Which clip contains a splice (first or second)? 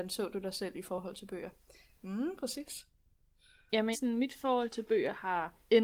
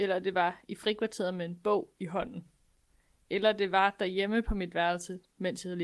first